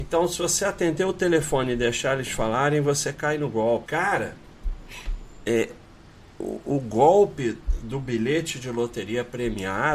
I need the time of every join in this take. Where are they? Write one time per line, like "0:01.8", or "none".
0:03.9
0:05.7